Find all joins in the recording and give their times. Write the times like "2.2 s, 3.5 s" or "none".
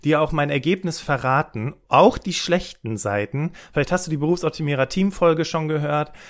none